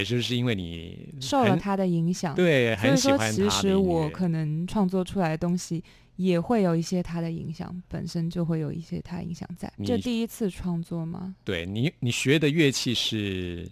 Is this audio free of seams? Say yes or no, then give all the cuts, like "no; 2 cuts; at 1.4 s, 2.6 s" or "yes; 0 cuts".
no; 1 cut; at 9.8 s